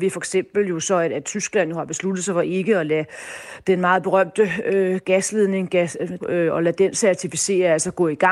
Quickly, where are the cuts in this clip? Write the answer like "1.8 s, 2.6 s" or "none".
6.2 s